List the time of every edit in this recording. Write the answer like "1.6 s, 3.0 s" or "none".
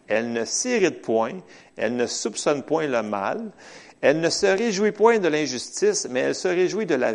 none